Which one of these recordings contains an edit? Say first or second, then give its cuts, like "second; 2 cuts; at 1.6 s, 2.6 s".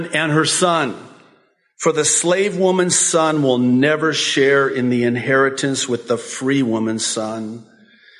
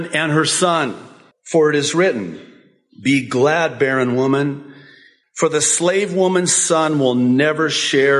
second; 2 cuts; at 1.3 s, 5.2 s